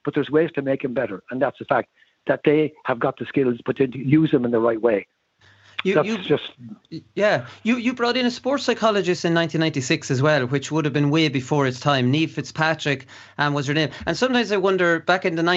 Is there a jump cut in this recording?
no; 0 cuts

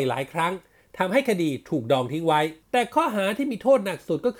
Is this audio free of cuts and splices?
no; 1 cut; at 2.6 s

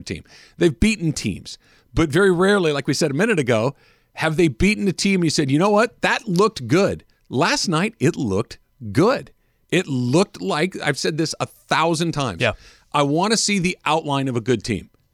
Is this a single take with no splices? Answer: yes; 0 cuts

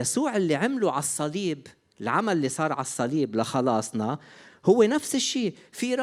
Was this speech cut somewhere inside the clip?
no; 0 cuts

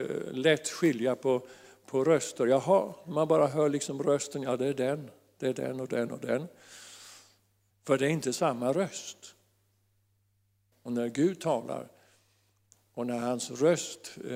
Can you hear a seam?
yes; 2 cuts; at 7.7 s, 10.7 s

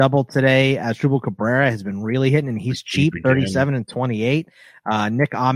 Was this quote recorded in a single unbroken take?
yes; 0 cuts

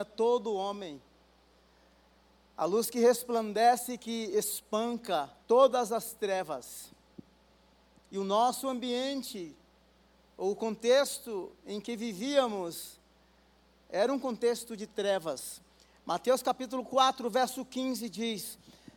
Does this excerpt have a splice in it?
yes; 1 cut; at 5.4 s

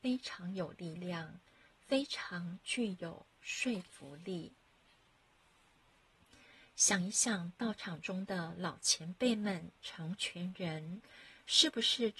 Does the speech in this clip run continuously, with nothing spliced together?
yes; 0 cuts

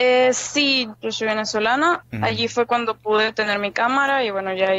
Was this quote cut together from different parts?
yes; 2 cuts; at 0.9 s, 2.0 s

